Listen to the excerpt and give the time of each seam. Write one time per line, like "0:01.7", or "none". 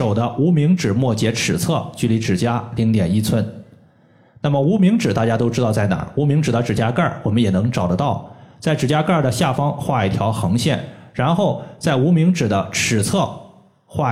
none